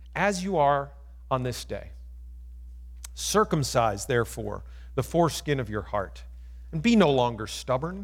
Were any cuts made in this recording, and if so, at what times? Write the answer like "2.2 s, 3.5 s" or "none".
none